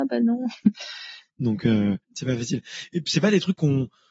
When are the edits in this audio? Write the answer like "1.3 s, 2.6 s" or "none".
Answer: 1.3 s